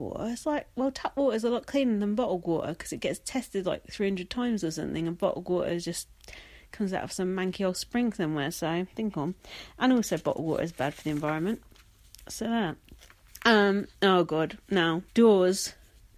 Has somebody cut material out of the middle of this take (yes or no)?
yes